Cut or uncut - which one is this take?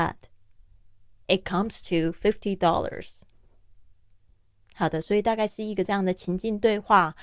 uncut